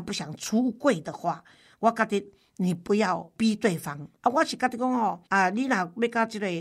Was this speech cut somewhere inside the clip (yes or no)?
yes